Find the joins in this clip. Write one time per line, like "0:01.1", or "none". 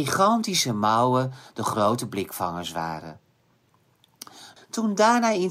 0:04.6